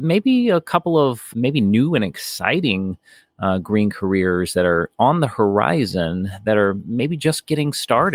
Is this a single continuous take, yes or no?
yes